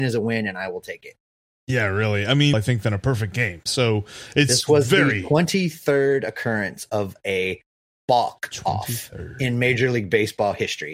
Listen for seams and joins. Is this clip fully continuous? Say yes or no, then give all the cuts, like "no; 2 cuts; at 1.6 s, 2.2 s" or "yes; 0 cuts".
no; 1 cut; at 2.5 s